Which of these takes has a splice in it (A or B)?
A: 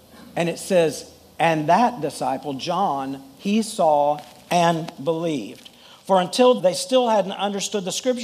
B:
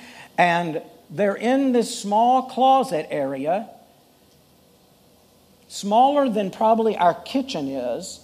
A